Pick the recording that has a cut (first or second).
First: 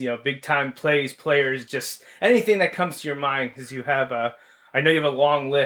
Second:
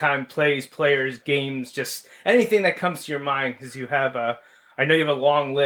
first